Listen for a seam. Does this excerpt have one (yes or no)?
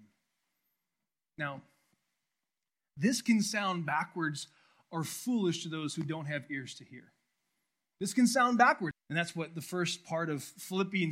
yes